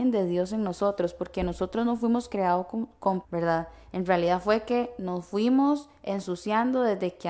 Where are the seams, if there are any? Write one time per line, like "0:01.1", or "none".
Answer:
0:03.2

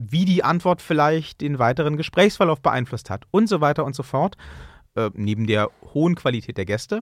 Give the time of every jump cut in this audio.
0:04.9

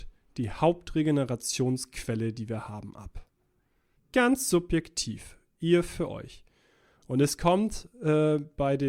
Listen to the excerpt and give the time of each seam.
0:04.0

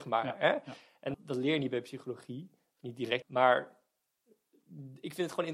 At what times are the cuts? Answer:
0:01.1
0:03.2

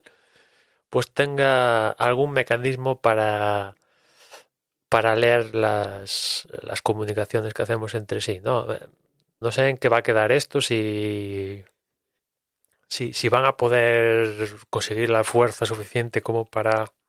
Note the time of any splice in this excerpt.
0:09.4

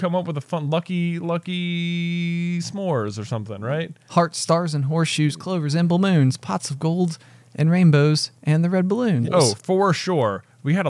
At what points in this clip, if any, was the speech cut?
0:09.2

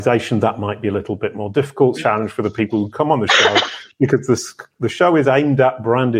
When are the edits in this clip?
0:02.0

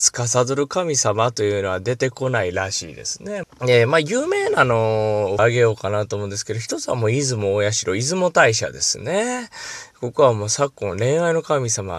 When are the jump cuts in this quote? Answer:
0:03.4
0:05.4

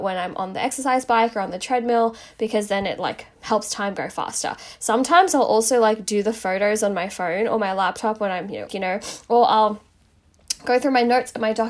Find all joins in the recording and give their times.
0:08.7

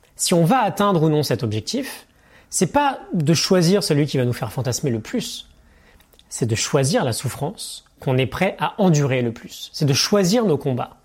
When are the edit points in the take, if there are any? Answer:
none

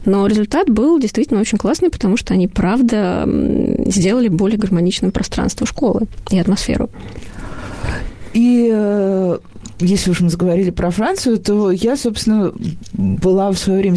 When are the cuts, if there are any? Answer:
none

